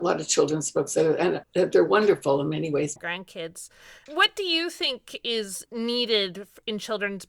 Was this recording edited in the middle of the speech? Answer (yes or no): yes